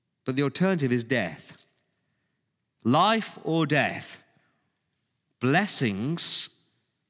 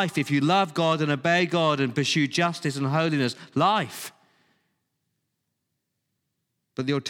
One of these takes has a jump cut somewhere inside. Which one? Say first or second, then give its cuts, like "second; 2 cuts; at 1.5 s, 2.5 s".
first; 1 cut; at 2.8 s